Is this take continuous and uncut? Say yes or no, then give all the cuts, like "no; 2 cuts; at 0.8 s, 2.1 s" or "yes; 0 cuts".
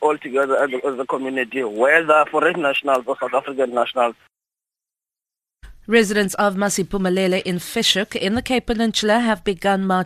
yes; 0 cuts